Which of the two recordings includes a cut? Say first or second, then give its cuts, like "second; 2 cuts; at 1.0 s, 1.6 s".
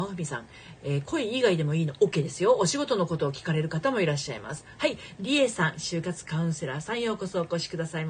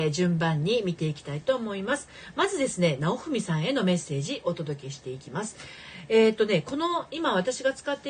first; 1 cut; at 5.2 s